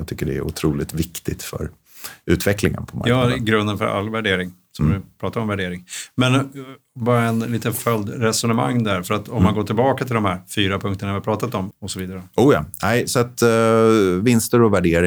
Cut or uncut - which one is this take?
cut